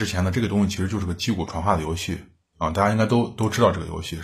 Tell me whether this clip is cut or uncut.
uncut